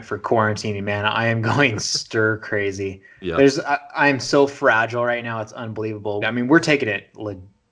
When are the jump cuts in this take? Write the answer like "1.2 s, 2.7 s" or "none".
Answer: 6.2 s

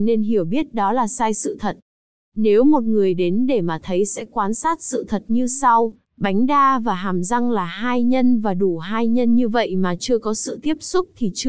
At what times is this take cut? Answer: none

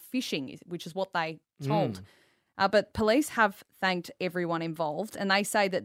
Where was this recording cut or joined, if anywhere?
2.5 s

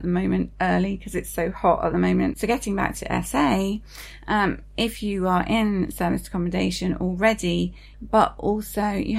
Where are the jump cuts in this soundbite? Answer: 2.3 s, 7.9 s

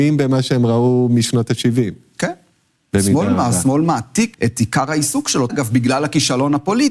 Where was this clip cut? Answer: 4.3 s, 5.5 s

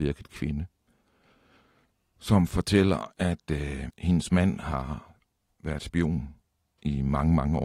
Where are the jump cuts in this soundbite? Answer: 3.9 s

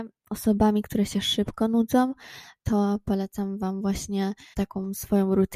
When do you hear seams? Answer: 4.5 s

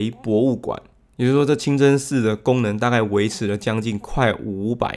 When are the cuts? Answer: none

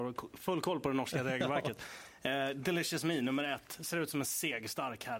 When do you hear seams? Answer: none

